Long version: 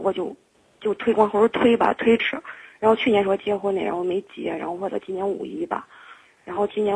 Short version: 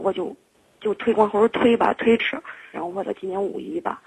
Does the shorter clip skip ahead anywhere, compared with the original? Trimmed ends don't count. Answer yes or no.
yes